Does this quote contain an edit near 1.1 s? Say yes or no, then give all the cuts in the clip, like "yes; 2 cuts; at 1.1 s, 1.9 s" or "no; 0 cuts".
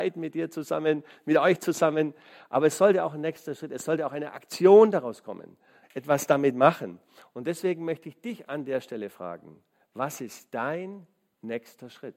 no; 1 cut; at 5.8 s